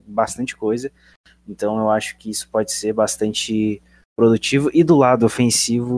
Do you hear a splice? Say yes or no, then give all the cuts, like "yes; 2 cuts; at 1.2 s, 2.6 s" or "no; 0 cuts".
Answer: no; 0 cuts